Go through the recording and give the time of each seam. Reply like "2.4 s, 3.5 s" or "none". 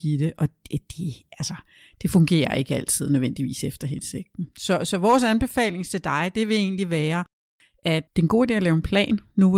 8.1 s